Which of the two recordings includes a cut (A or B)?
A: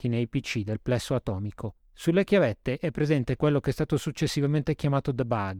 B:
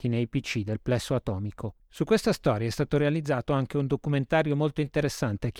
B